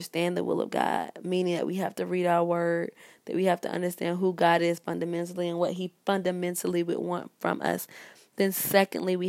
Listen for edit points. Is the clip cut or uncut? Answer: uncut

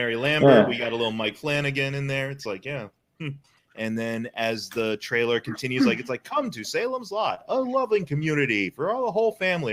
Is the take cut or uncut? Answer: cut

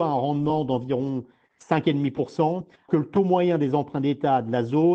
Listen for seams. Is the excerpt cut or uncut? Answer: cut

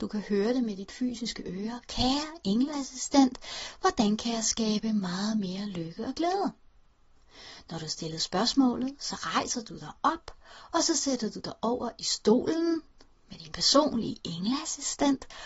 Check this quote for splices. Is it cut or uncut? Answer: uncut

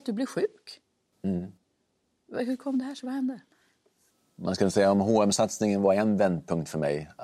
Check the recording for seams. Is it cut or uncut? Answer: uncut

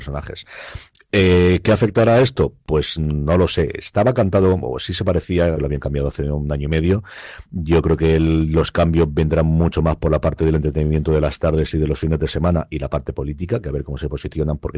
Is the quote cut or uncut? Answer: cut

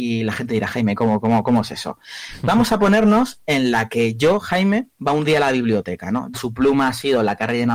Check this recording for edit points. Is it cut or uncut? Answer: cut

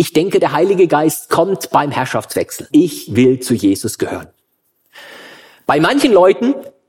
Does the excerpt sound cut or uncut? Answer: cut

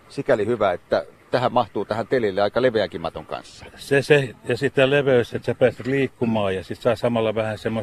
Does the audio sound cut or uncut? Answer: uncut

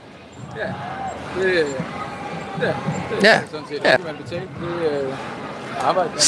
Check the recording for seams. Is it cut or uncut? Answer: cut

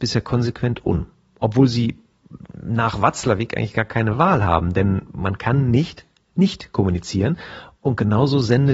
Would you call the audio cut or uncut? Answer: uncut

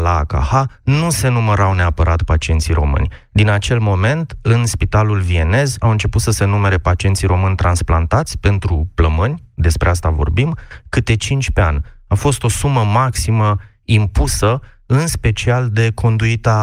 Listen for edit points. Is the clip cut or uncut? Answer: uncut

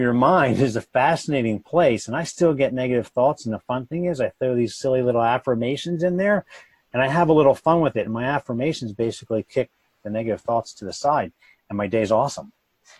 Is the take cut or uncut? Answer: uncut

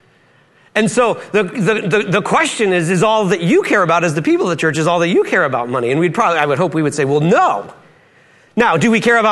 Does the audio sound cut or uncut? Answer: uncut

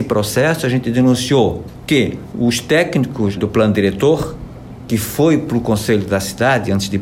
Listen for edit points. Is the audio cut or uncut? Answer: cut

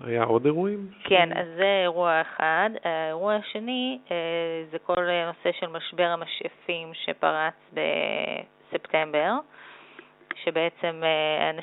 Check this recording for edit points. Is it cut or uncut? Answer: uncut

